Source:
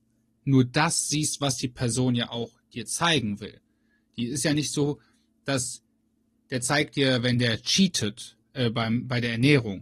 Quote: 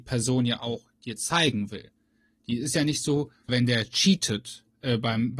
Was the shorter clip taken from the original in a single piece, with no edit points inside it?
no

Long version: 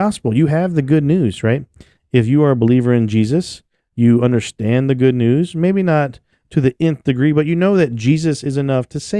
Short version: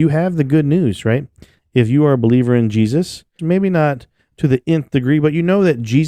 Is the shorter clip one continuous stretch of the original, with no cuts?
no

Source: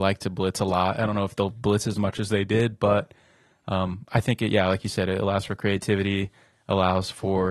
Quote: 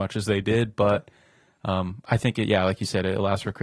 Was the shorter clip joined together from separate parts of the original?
no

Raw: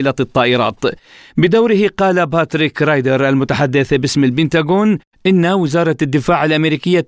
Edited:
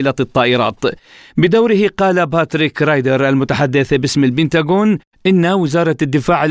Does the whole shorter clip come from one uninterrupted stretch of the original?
yes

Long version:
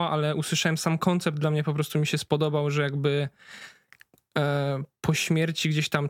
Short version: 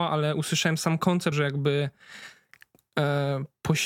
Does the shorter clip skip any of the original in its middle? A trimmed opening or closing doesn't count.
yes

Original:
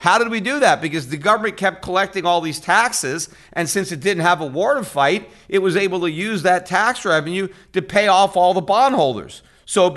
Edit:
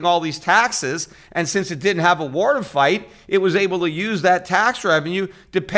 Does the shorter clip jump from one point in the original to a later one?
no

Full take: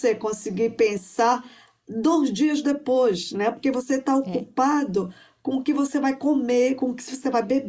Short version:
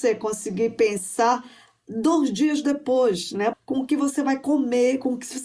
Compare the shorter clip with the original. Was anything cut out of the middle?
yes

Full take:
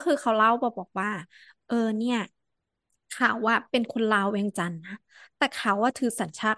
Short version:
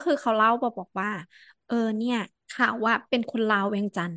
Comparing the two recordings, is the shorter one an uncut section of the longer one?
no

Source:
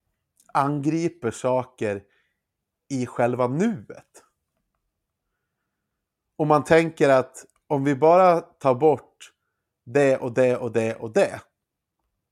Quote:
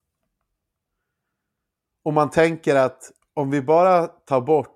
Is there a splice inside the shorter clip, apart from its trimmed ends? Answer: no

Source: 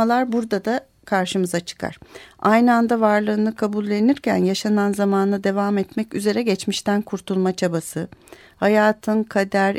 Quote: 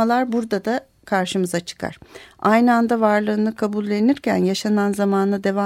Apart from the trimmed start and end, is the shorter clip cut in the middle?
no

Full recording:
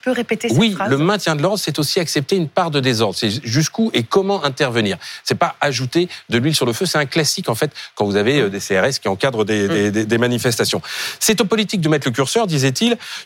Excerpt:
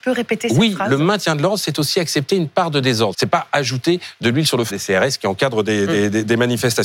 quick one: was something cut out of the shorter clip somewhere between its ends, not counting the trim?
yes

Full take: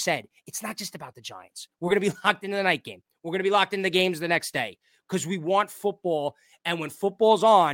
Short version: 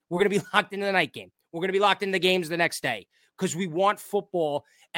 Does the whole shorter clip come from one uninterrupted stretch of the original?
yes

